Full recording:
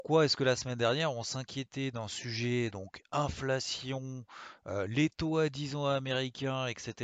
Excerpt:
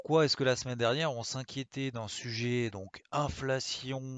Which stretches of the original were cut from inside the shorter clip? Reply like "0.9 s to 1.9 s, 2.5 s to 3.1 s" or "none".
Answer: none